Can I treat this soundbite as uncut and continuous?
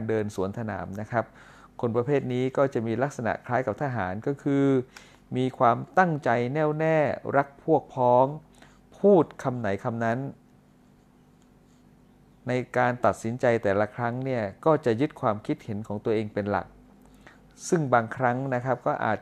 yes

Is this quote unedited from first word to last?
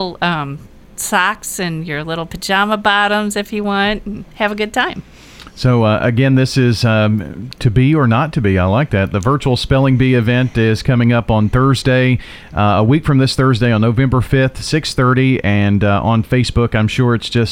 yes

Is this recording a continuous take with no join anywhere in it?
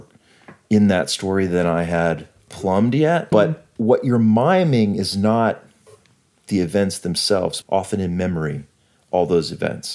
no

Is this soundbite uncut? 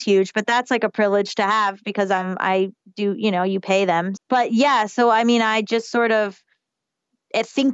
no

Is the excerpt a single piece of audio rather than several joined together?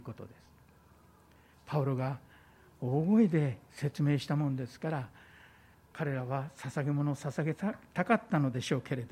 no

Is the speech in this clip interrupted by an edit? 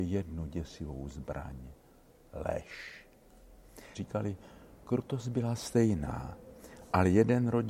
yes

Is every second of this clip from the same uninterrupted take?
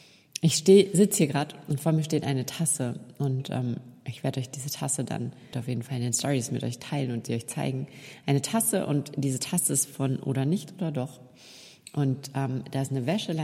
no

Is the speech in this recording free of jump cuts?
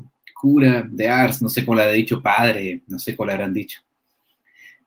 yes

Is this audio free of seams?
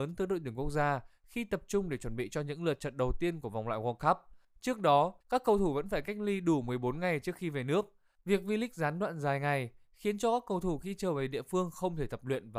no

